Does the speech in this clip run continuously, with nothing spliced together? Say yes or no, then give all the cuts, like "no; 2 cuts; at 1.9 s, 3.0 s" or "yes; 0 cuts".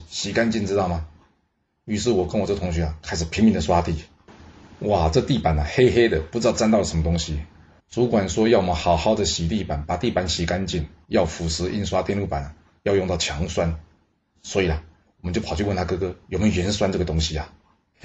no; 2 cuts; at 7.8 s, 11.0 s